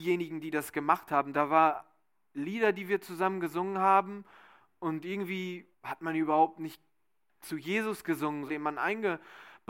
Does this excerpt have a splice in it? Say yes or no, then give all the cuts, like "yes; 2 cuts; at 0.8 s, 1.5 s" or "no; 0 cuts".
yes; 3 cuts; at 1.3 s, 5.7 s, 8.5 s